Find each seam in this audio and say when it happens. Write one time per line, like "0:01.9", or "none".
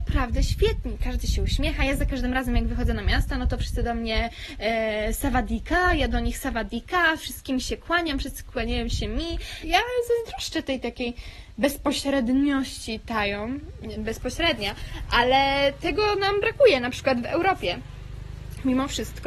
0:09.6
0:14.0